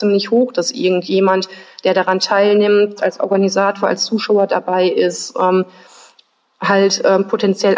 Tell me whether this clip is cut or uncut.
cut